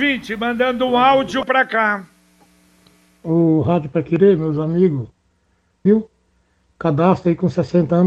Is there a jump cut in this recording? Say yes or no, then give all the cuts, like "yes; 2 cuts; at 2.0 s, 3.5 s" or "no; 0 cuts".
yes; 1 cut; at 5.9 s